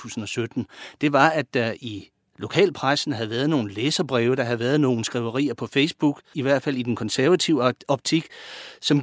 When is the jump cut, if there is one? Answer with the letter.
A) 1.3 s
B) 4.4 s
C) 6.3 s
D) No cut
C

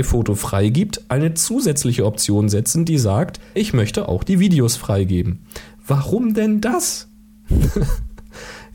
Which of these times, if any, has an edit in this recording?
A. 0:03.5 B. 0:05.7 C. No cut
A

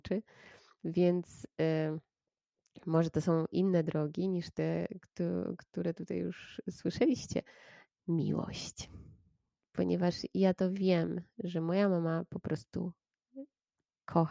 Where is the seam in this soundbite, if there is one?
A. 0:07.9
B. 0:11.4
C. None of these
A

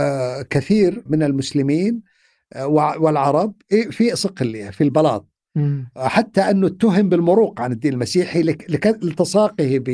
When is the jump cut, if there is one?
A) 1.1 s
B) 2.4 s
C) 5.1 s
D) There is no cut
A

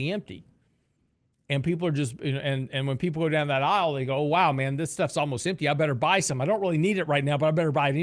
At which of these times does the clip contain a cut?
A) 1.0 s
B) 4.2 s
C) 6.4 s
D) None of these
D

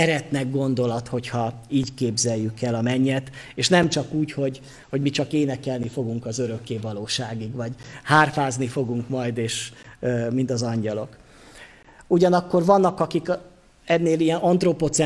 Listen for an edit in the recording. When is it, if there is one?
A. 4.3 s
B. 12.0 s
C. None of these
B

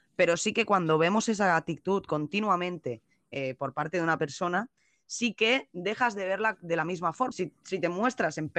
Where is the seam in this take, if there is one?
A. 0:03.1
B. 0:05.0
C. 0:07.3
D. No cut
C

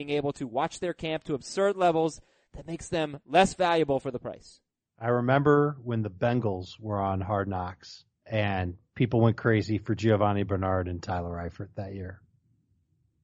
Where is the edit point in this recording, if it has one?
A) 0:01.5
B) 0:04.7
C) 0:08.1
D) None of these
C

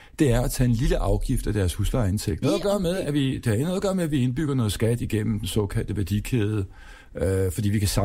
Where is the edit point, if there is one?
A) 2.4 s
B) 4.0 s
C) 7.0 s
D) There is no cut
A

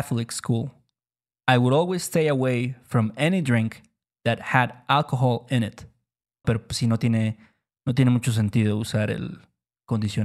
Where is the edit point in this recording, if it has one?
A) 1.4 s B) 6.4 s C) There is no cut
B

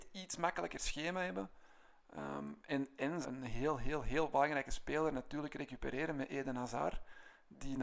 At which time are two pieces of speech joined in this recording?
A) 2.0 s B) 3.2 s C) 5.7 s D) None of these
B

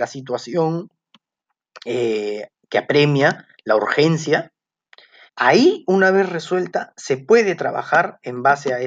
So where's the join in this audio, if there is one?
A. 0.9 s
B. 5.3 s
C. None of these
B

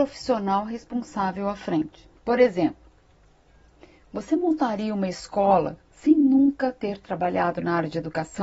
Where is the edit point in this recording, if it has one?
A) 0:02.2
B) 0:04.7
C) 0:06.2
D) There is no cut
A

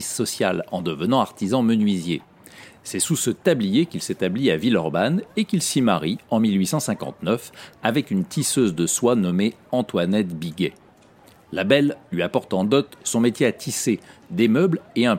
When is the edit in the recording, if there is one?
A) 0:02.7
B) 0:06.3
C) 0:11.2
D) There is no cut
D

